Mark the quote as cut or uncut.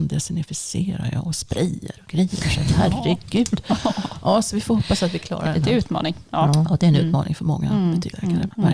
uncut